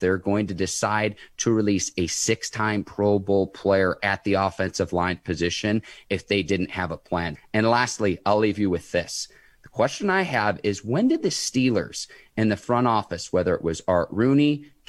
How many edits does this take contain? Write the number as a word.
one